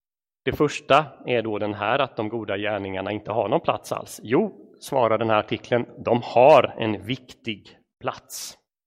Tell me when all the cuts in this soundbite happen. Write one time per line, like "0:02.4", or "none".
none